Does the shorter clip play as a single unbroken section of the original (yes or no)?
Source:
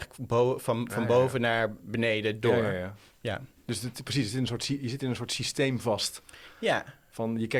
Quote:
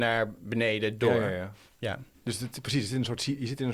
yes